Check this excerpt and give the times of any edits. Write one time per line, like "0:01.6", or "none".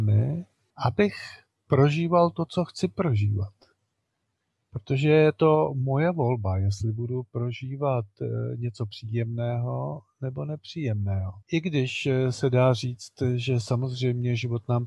0:11.4